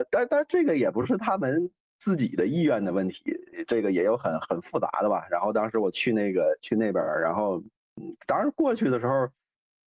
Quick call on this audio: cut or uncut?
uncut